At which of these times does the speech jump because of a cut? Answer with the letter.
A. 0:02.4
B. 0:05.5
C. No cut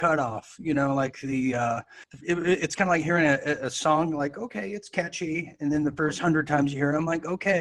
C